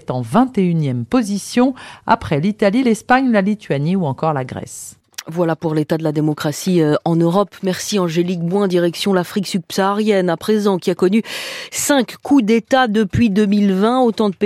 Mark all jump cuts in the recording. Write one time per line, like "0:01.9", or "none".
none